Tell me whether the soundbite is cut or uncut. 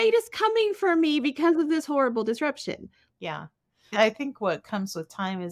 cut